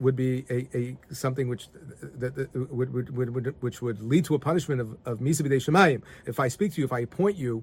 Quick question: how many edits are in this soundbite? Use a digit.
1